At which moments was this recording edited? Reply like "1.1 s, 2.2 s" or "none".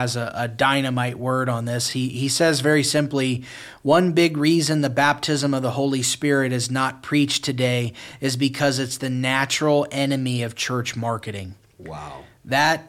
none